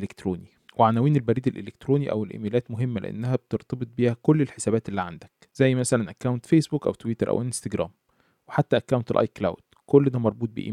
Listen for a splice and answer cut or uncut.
uncut